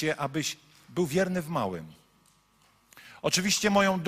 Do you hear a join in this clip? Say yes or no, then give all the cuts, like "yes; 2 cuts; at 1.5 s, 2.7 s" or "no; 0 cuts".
no; 0 cuts